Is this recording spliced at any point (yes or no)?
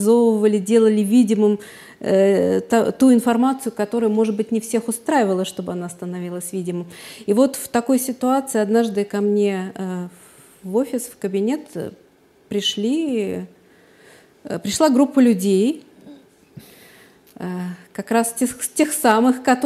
no